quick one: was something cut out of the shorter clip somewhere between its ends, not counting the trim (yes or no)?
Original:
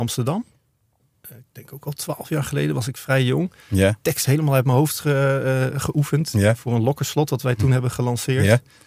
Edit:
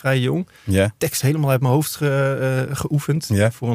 no